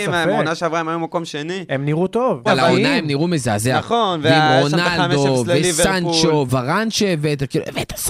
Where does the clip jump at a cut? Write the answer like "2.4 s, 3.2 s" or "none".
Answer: 2.5 s, 6.5 s